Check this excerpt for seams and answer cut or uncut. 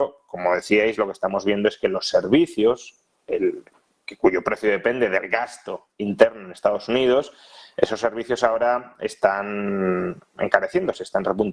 uncut